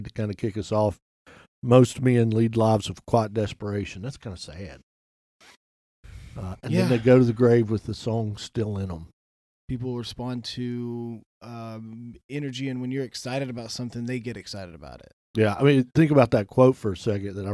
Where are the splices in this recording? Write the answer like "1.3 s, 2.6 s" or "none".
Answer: 9.5 s